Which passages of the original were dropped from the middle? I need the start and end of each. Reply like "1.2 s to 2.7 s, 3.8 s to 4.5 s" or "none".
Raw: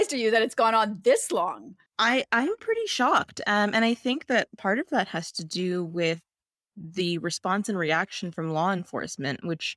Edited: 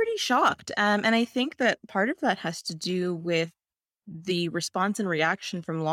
none